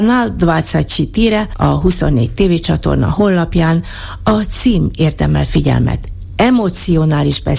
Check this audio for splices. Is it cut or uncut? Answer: uncut